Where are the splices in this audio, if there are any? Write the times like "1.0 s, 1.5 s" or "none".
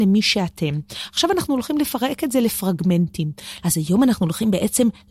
3.6 s